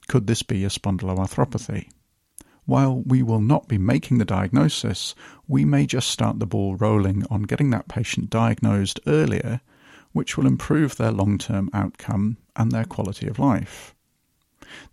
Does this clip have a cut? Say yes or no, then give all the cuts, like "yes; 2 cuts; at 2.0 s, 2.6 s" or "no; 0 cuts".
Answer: no; 0 cuts